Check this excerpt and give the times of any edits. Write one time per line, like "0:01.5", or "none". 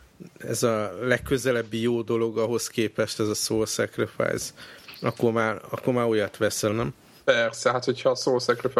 0:06.7